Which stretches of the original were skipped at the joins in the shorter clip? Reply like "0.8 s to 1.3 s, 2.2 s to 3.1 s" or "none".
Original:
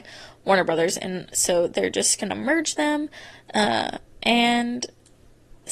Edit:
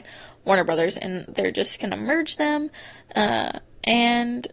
1.3 s to 1.7 s

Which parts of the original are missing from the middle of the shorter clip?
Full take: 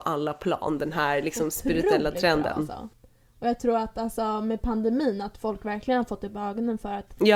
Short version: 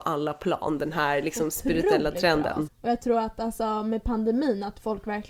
2.7 s to 3.2 s

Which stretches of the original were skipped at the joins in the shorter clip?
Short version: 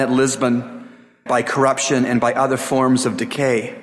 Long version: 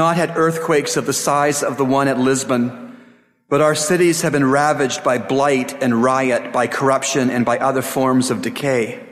3.3 s to 6.5 s

